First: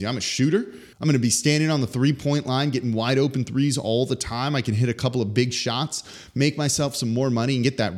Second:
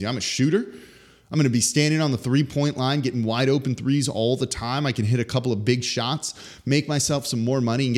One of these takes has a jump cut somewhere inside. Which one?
first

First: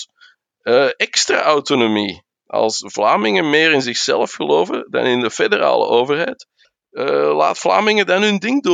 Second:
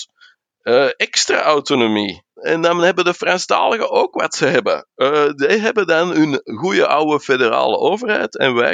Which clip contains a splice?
second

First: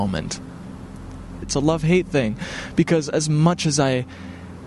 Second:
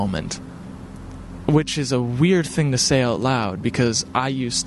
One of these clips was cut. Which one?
first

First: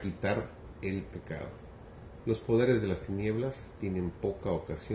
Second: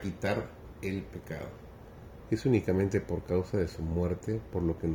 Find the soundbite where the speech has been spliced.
second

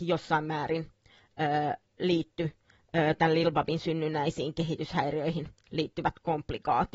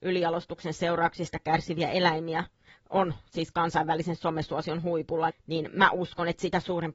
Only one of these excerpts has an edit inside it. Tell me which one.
second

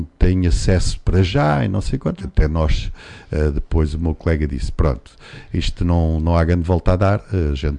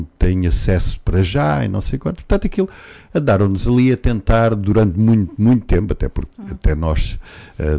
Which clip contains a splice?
first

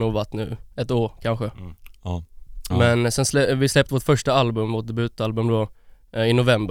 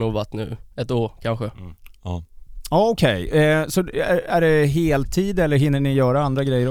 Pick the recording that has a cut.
first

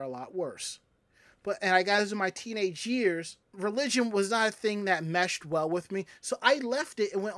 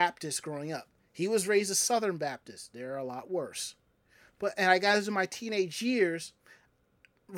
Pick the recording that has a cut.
first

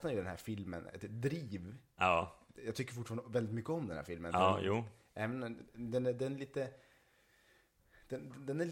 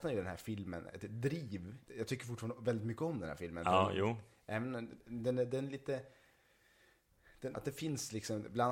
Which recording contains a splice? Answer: second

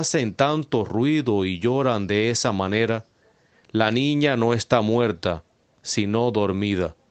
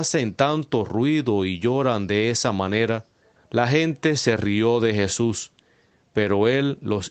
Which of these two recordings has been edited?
second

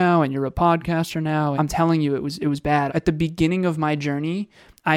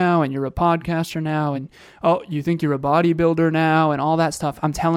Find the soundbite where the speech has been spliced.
first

